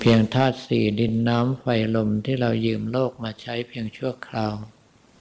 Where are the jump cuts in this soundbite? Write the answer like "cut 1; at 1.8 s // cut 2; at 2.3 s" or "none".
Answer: none

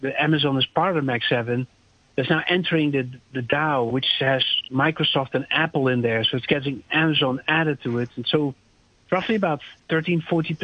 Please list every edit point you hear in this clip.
none

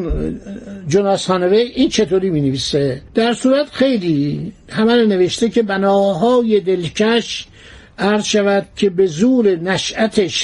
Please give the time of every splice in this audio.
cut 1; at 3.1 s

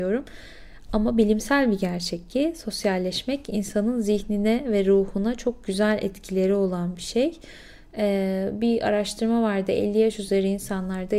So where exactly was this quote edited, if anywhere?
none

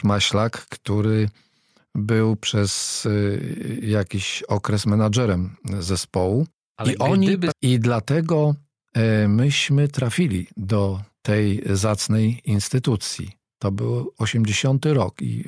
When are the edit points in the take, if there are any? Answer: cut 1; at 7.5 s

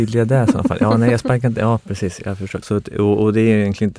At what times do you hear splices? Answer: cut 1; at 2.6 s

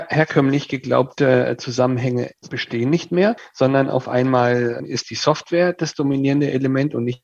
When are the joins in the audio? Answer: cut 1; at 2.4 s

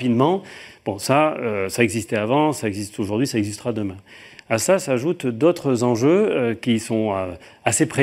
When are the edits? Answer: none

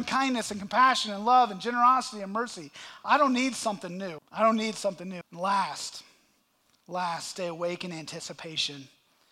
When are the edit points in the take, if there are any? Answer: cut 1; at 4.2 s // cut 2; at 5.2 s

